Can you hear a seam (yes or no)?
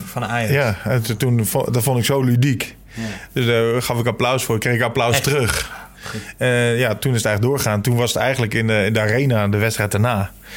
no